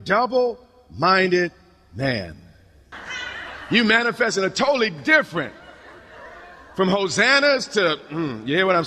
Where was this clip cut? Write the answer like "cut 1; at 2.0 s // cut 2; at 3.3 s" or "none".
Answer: cut 1; at 2.9 s